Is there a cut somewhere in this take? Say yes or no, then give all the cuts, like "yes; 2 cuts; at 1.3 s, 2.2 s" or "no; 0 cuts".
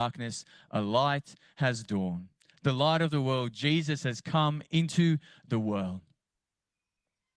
no; 0 cuts